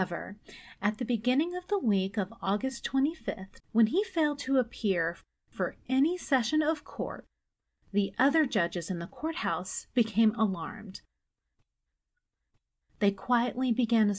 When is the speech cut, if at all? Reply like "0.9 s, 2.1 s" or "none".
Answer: 3.6 s